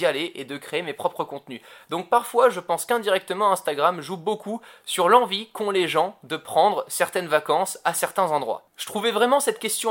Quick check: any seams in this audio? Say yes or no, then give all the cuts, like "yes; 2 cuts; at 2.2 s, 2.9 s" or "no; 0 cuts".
no; 0 cuts